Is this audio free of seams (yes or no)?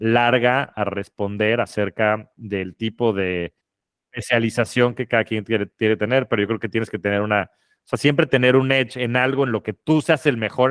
yes